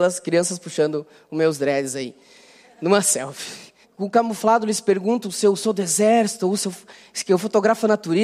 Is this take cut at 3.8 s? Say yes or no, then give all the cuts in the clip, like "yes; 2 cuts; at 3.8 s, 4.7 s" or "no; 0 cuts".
yes; 1 cut; at 3.8 s